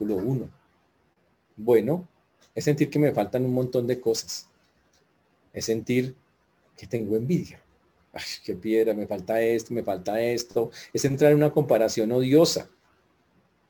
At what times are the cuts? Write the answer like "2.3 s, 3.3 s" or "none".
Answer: none